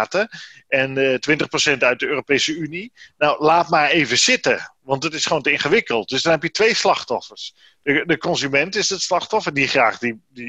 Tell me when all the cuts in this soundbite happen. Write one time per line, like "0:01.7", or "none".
none